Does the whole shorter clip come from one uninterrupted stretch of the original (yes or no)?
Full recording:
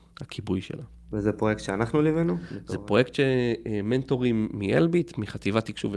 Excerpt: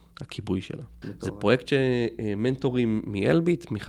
no